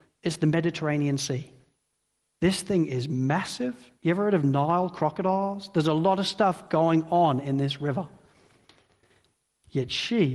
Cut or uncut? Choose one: uncut